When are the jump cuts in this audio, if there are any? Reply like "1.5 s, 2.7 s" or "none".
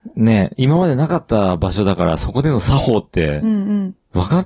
none